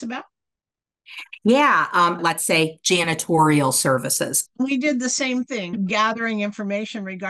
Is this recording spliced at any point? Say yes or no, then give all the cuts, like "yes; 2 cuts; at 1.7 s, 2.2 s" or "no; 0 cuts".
yes; 3 cuts; at 2.2 s, 4.5 s, 5.7 s